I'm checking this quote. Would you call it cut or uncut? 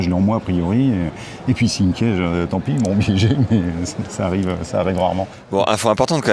uncut